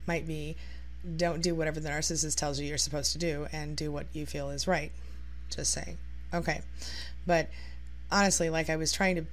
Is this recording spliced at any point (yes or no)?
no